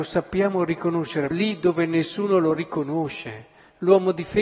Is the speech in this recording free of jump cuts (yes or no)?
no